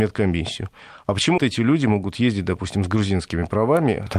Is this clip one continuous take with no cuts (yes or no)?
no